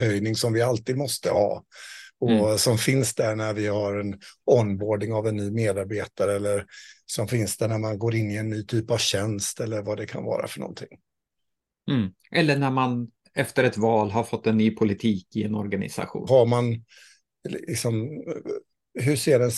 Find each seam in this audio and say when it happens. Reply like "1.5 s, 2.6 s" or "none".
16.3 s